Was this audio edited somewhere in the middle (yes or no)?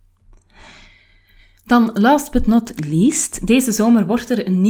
no